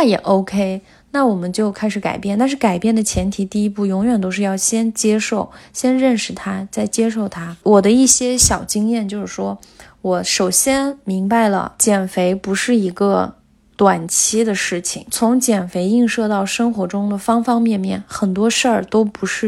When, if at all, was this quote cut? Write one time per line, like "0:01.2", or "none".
0:07.6